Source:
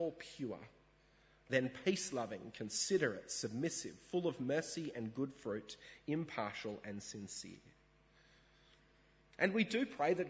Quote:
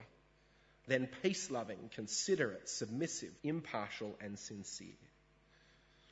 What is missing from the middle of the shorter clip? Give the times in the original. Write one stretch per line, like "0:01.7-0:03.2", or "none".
0:04.0-0:06.0